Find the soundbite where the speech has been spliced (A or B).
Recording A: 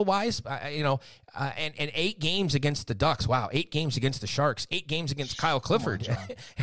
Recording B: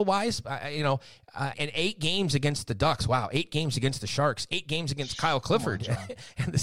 B